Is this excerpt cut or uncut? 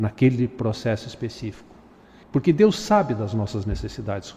cut